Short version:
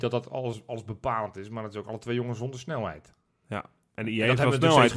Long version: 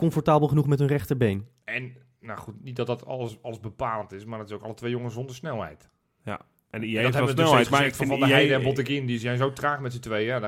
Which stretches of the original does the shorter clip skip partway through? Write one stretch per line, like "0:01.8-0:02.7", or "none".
none